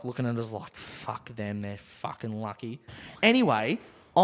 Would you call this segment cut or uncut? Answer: uncut